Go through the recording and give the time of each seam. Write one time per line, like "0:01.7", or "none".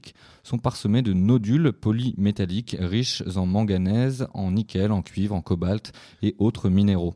none